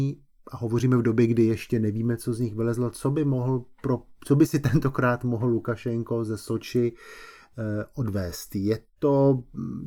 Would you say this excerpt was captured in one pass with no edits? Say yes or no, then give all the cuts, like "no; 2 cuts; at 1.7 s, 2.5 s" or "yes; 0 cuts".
yes; 0 cuts